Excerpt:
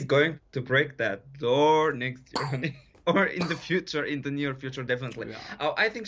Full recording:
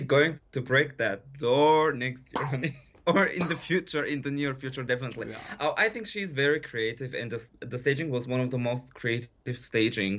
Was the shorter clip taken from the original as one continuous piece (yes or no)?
yes